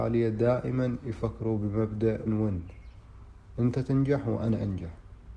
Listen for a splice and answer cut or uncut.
cut